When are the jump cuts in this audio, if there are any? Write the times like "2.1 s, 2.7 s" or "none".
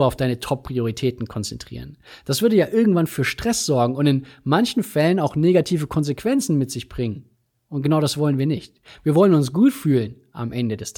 none

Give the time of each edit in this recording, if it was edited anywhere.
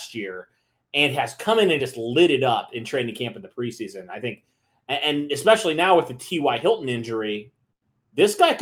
none

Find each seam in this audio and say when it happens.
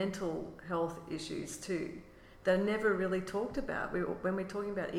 none

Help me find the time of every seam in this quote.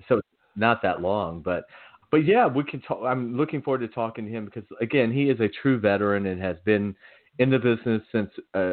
2.0 s

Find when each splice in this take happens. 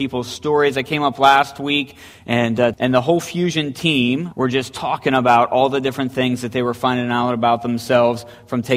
2.7 s, 4.3 s

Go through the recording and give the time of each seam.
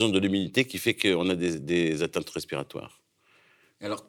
none

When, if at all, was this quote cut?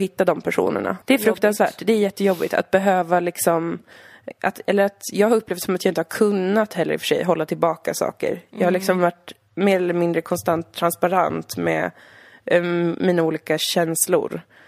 1.0 s, 4.3 s

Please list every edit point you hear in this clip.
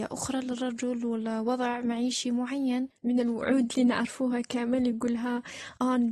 3.0 s

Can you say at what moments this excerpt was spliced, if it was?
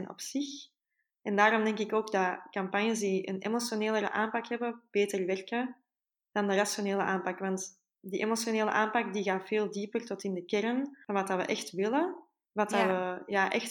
none

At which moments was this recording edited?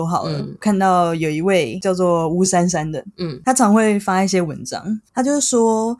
none

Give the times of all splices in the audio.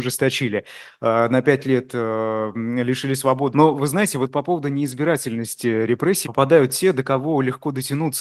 3.5 s, 6.2 s

